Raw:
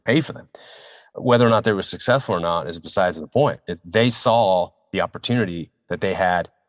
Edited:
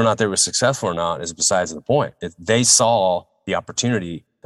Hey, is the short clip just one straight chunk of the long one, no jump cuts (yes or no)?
yes